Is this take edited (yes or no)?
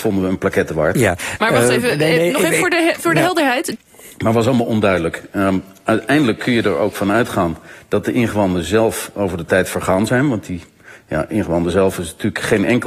yes